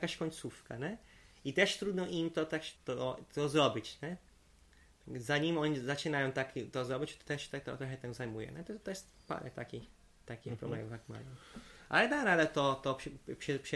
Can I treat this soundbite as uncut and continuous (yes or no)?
no